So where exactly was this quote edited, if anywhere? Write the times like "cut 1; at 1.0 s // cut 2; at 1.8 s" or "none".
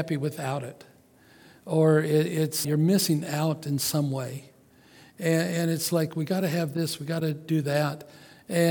cut 1; at 2.6 s